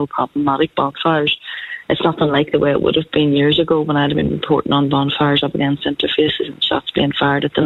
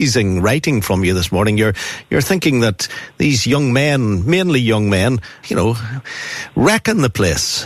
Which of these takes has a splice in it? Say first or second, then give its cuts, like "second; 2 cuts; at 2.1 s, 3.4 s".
second; 1 cut; at 5.4 s